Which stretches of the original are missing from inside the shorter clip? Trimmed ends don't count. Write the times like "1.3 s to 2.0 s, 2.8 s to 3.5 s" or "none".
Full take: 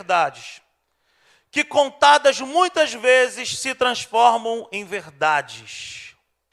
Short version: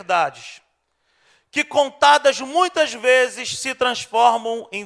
none

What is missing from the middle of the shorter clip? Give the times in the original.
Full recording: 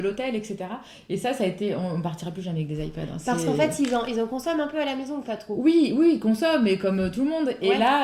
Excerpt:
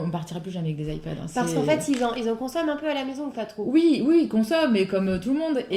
none

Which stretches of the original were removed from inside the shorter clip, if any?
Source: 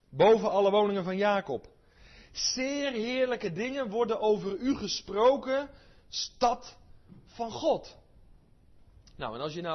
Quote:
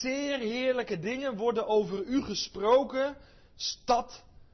none

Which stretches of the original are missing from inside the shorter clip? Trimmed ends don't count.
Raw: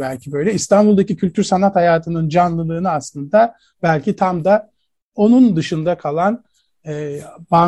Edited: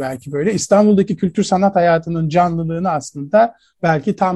none

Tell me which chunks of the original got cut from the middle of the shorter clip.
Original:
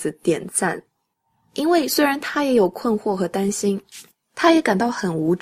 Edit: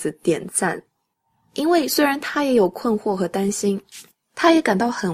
none

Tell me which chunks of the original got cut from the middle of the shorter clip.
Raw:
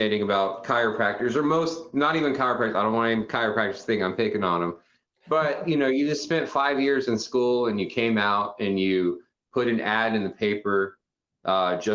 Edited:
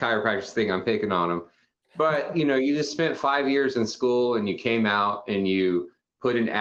none

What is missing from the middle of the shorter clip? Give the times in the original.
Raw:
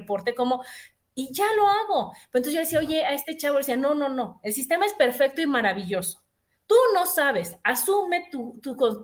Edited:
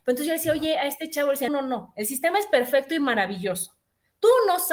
3.7 s to 3.9 s

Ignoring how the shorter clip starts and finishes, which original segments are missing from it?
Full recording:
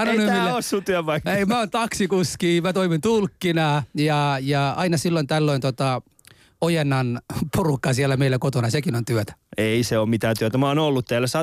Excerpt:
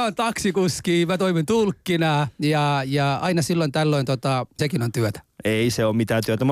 6.1 s to 8.7 s

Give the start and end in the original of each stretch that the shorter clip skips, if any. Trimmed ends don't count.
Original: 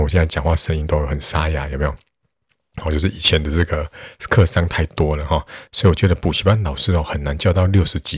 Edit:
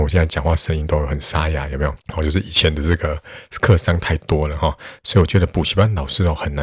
2.0 s to 2.7 s

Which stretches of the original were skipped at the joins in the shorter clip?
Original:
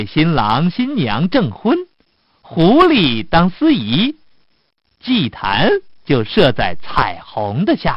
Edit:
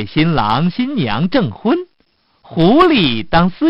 none

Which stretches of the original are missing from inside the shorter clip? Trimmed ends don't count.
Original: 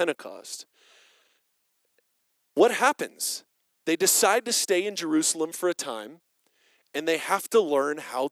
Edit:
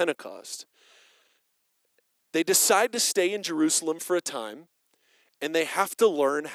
2.2 s to 3.8 s

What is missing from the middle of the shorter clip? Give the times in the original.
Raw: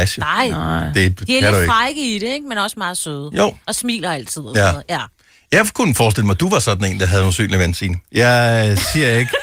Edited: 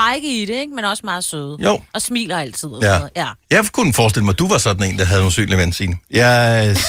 5.2 s to 5.4 s

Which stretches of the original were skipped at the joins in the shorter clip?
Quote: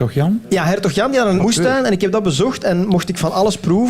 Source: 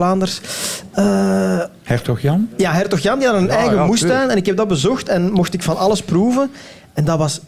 3.5 s to 3.8 s

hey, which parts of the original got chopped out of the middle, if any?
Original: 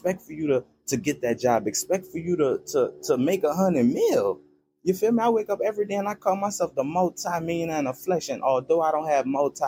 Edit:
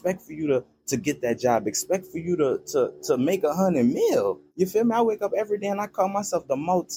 4.5 s to 4.8 s

